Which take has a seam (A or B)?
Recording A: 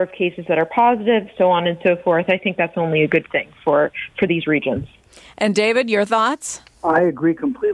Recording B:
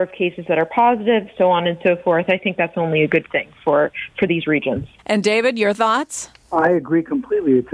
B